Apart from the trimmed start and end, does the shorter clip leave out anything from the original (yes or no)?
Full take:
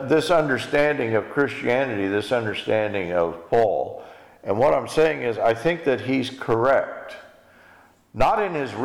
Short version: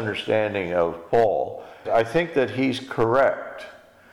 yes